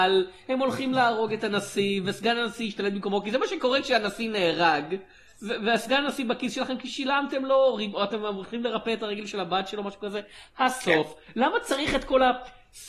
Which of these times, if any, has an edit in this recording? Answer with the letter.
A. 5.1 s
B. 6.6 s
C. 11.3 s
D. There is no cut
D